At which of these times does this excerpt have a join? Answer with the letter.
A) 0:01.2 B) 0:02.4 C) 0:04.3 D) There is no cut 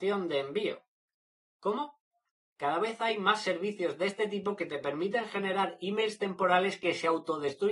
B